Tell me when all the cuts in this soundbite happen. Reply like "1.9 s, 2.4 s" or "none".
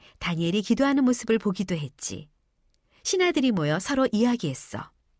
none